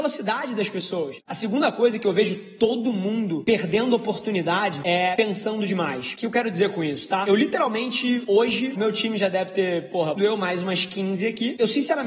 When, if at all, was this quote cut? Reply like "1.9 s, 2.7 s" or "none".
1.2 s, 10.2 s